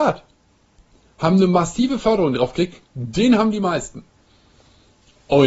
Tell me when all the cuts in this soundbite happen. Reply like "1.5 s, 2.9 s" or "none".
2.8 s